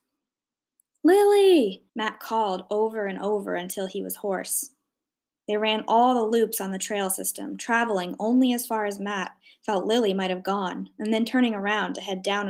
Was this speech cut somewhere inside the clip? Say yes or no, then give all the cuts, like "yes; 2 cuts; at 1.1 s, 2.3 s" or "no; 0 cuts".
yes; 1 cut; at 1.9 s